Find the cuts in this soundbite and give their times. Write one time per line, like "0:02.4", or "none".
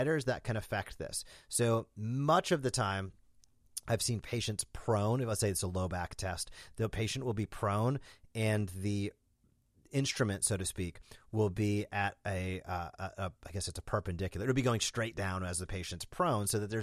none